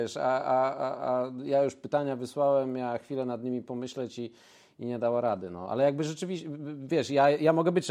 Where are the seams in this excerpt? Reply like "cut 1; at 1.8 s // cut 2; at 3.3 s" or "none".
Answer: none